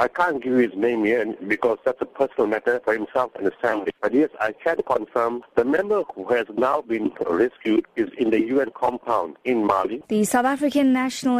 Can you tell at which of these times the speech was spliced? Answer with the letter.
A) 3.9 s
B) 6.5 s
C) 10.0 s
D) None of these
C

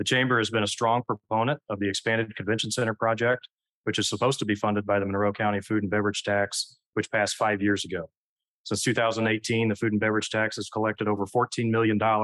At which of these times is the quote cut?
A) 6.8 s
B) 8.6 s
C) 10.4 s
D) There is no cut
D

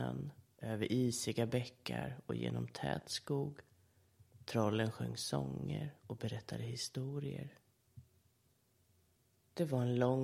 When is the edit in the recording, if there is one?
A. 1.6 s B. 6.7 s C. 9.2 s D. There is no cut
D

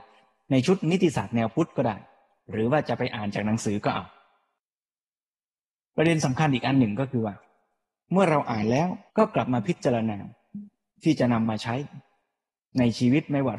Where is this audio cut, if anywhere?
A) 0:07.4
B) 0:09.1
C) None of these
B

